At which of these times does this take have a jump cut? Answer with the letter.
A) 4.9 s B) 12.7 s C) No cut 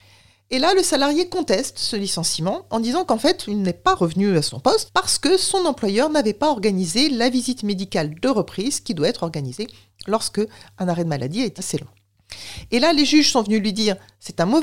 A